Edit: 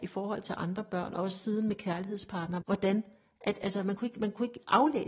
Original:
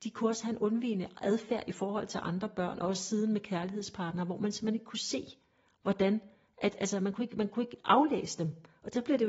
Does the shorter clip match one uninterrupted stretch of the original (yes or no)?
no